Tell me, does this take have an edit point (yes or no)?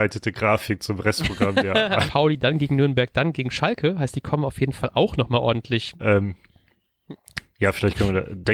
yes